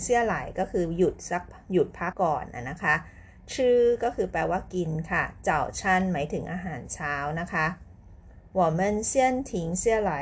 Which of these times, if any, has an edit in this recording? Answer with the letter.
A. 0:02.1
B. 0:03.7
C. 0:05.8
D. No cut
A